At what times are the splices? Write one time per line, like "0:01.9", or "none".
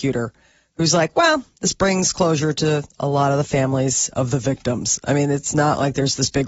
none